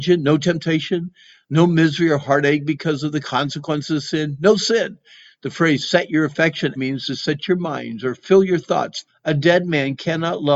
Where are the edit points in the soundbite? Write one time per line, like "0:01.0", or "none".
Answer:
0:06.8
0:09.1